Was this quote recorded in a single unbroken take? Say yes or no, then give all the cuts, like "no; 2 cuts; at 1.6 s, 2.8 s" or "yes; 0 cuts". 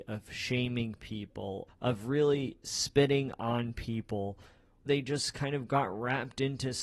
no; 2 cuts; at 1.7 s, 4.9 s